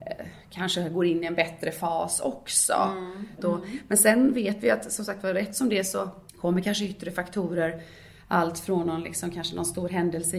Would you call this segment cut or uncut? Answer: cut